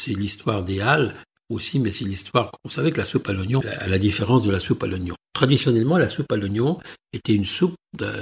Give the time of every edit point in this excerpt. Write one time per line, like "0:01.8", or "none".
0:03.6